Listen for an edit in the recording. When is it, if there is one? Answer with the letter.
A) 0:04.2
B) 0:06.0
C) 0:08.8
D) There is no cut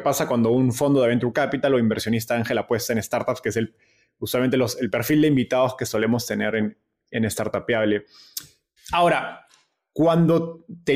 C